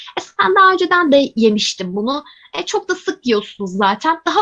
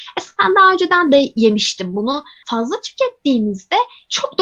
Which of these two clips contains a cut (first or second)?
second